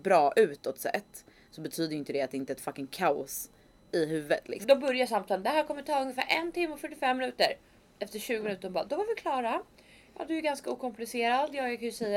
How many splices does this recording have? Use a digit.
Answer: 1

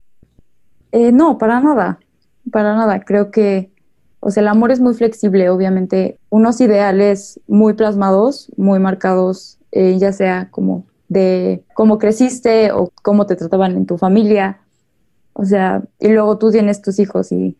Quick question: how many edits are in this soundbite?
3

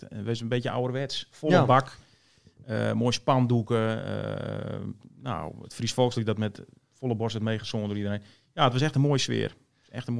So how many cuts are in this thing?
0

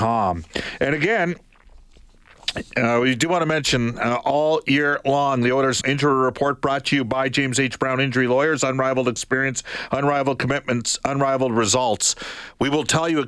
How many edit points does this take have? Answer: 1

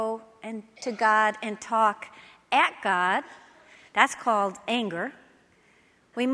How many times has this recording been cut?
0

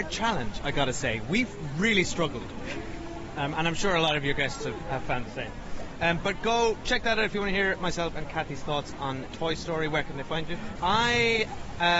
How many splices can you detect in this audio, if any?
2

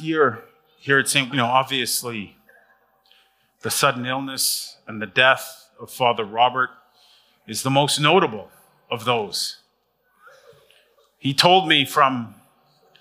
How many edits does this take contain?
1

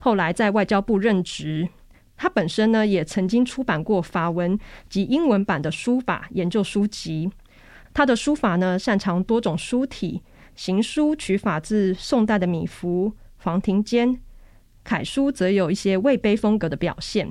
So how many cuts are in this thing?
0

